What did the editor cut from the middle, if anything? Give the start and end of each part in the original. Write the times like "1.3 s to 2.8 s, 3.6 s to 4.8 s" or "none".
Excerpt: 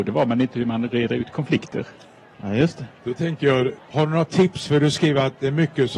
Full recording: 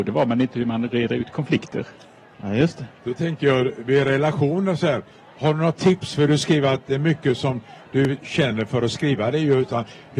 3.8 s to 5.2 s